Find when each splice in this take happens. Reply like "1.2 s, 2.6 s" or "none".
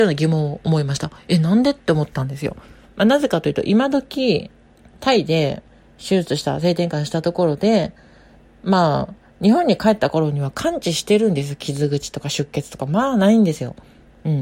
none

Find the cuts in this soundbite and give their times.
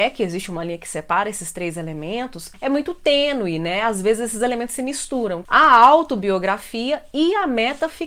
5.4 s

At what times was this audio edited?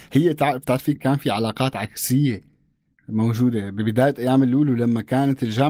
0.9 s

